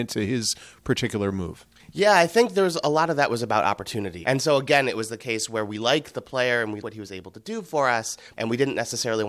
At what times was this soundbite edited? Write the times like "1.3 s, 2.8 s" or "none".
4.2 s, 6.8 s, 8.3 s

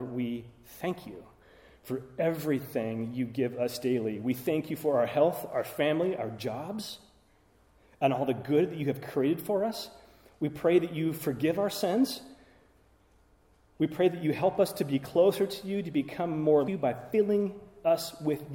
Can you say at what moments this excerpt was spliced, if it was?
16.7 s

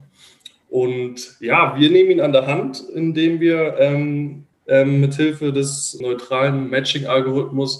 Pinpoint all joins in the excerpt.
4.5 s, 6.0 s

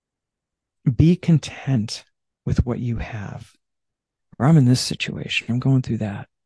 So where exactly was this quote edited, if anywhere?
4.2 s, 5.5 s

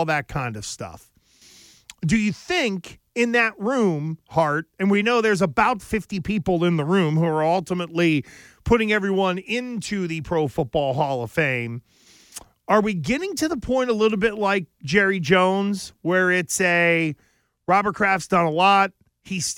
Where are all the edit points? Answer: none

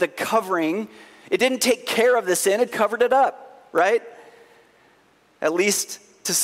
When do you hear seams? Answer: 2.7 s

